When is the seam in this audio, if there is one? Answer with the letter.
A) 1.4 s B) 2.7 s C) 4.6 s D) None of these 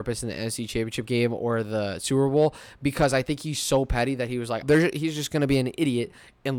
C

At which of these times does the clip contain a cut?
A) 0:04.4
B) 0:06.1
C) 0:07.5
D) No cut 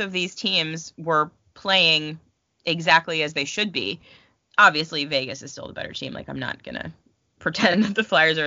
D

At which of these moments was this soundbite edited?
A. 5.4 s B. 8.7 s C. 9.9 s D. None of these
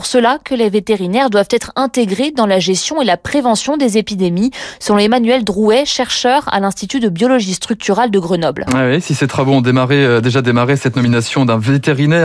B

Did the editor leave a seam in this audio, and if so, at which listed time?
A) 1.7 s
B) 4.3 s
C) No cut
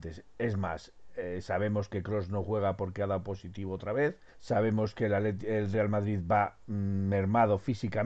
B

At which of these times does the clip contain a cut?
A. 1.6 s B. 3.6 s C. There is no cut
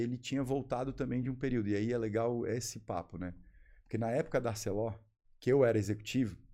C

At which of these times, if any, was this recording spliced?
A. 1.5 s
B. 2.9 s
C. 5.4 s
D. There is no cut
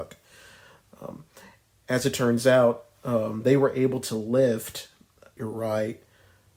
C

